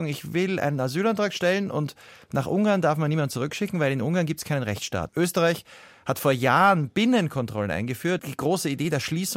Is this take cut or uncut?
cut